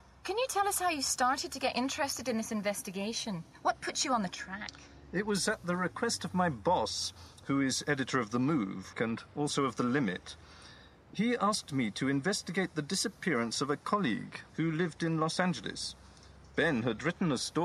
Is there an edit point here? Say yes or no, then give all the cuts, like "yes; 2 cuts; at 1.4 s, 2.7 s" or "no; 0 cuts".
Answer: yes; 2 cuts; at 8.9 s, 14.5 s